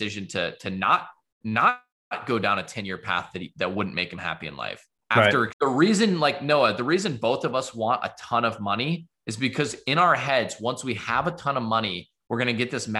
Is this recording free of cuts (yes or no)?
no